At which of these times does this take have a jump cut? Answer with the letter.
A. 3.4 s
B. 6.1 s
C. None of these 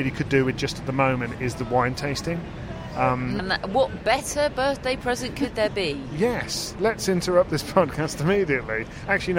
A